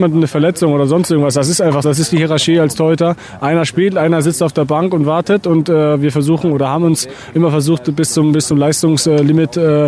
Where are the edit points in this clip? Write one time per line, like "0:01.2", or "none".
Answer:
0:01.8